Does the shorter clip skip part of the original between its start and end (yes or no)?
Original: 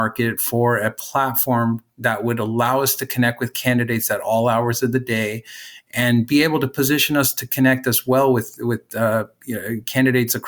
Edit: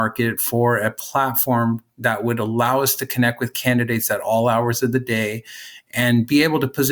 no